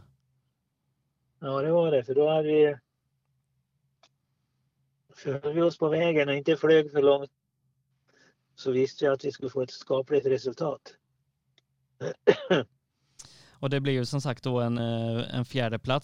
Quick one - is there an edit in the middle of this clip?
yes; 1 cut; at 14.8 s

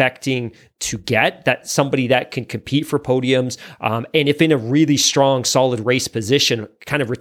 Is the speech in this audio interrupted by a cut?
no; 0 cuts

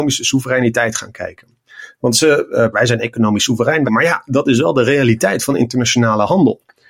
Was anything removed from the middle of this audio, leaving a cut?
yes; 2 cuts; at 2.7 s, 3.9 s

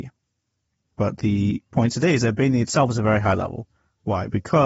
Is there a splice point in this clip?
yes; 1 cut; at 0.9 s

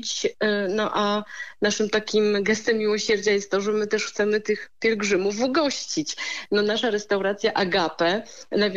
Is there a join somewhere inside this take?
no; 0 cuts

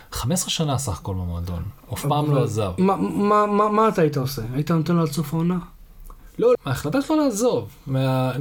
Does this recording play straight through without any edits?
no; 2 cuts; at 2.8 s, 6.5 s

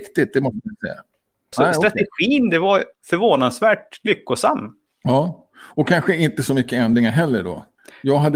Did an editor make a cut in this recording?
yes; 2 cuts; at 1.5 s, 2.9 s

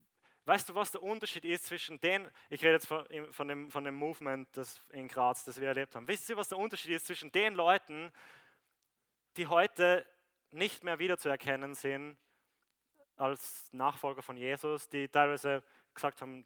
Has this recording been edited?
no; 0 cuts

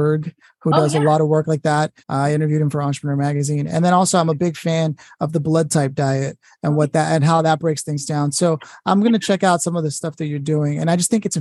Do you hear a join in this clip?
yes; 1 cut; at 2.0 s

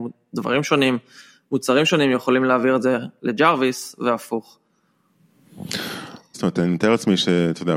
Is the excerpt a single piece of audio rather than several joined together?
no; 1 cut; at 6.3 s

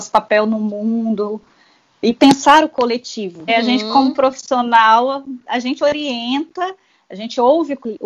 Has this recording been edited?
yes; 1 cut; at 3.5 s

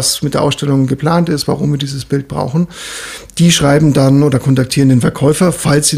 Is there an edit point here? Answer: no; 0 cuts

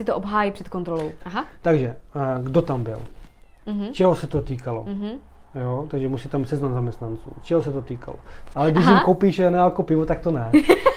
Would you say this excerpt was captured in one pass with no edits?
no; 2 cuts; at 1.2 s, 8.5 s

